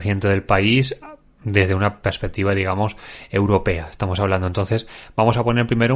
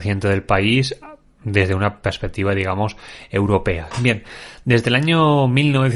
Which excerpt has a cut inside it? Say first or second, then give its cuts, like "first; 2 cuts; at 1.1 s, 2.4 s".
second; 1 cut; at 3.9 s